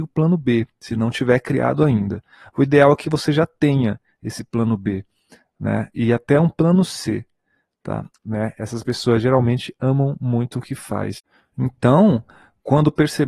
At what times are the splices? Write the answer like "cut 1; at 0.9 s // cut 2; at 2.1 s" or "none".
cut 1; at 8.1 s